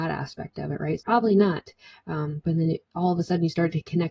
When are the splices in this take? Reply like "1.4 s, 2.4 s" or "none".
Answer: 1.0 s, 2.4 s